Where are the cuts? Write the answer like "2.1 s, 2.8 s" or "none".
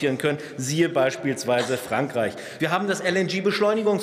none